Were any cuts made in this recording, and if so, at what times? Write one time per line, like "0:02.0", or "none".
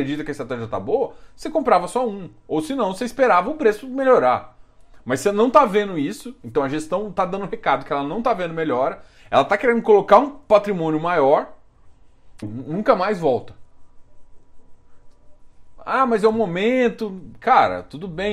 0:12.4
0:15.8